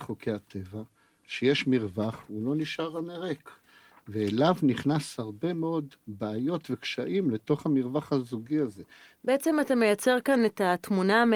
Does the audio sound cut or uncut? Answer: cut